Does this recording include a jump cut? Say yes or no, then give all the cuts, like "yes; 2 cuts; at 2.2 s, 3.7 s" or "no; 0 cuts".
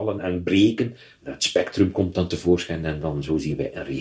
no; 0 cuts